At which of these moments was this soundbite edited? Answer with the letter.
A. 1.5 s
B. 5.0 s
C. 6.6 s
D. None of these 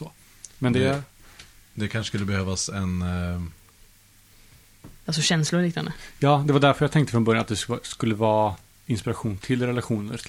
B